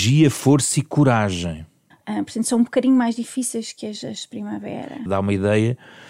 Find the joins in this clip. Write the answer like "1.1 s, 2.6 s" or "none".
1.9 s, 5.1 s